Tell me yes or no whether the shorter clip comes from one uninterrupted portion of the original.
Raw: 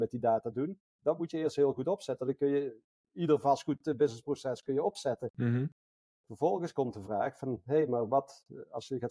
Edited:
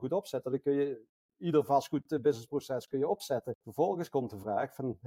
no